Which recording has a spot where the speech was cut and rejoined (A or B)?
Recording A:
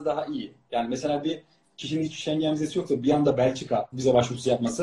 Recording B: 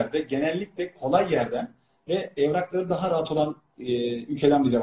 A